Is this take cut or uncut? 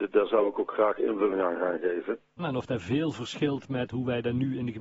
cut